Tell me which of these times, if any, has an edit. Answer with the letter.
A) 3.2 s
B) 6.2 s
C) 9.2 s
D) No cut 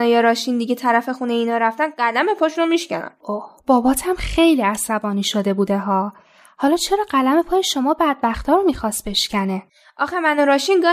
A